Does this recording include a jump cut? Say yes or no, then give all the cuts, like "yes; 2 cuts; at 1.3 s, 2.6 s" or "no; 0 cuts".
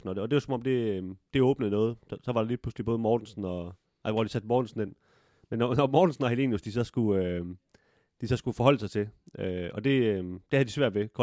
no; 0 cuts